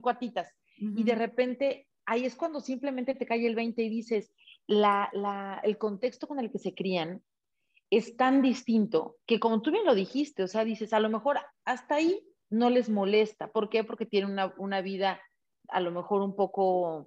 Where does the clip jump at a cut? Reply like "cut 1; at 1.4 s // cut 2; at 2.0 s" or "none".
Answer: cut 1; at 9.2 s // cut 2; at 11.5 s